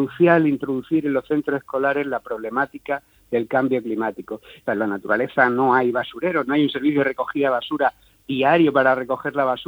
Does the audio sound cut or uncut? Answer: cut